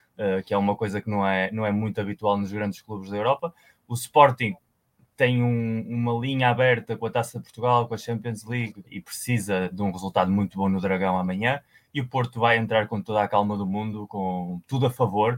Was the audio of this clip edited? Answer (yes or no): yes